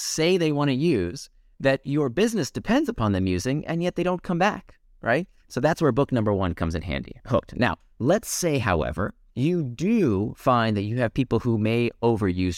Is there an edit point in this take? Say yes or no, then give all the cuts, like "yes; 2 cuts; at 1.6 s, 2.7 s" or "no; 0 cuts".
no; 0 cuts